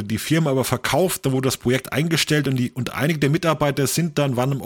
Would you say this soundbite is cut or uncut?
uncut